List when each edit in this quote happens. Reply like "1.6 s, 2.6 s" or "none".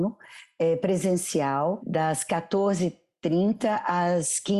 1.8 s